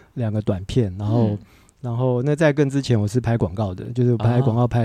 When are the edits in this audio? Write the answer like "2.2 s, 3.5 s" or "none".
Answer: none